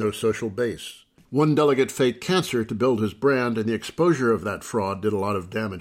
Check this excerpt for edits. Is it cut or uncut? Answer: uncut